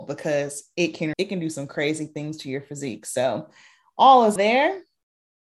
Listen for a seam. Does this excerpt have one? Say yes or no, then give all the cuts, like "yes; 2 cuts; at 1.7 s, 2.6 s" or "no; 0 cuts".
yes; 2 cuts; at 1.1 s, 4.4 s